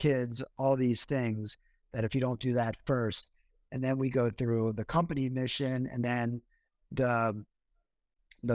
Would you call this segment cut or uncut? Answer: uncut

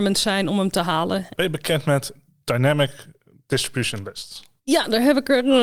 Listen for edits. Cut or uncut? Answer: cut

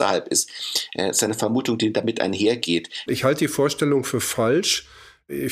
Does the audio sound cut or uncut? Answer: cut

